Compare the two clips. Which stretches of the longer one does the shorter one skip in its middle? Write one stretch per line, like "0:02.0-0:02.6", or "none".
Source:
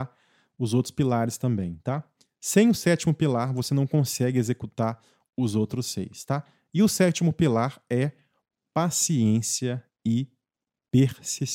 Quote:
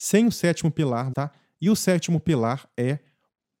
0:03.5-0:06.2